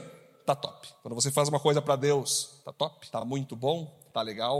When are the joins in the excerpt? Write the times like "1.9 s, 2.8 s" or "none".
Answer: none